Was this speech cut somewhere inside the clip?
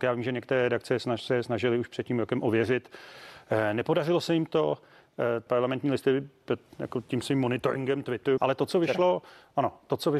yes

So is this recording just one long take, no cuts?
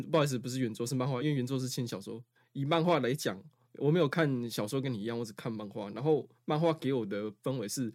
yes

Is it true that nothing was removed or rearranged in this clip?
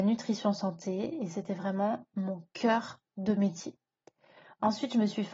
yes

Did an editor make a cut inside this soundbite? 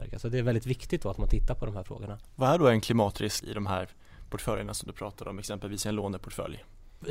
yes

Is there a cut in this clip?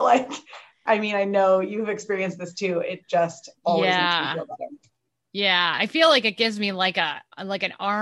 no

